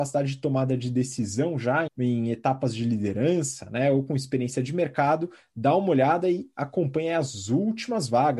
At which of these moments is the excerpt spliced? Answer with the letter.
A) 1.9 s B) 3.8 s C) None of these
A